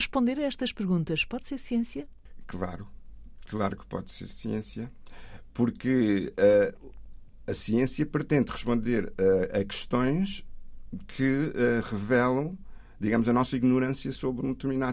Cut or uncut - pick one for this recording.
uncut